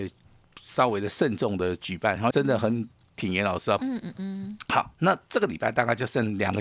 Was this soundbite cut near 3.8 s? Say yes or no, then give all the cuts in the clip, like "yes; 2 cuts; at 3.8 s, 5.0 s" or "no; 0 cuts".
yes; 2 cuts; at 2.3 s, 3.8 s